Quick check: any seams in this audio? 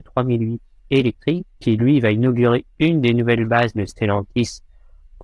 yes; 1 cut; at 1.5 s

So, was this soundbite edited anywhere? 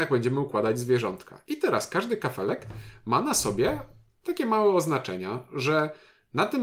no; 0 cuts

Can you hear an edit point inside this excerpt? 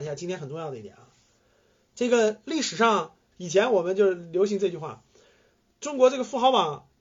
yes; 1 cut; at 3.3 s

